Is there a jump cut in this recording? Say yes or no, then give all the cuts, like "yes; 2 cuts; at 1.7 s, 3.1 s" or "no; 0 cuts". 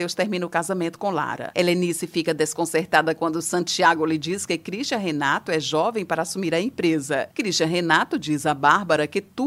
yes; 1 cut; at 1.5 s